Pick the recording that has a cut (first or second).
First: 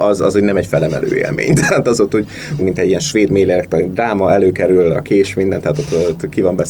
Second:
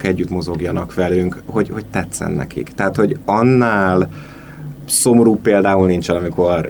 first